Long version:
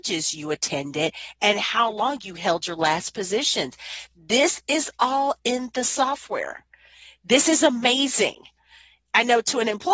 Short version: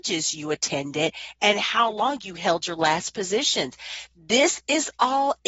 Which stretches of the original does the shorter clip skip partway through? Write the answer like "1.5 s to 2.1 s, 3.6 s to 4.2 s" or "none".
none